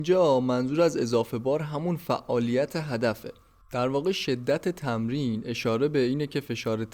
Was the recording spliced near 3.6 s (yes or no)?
yes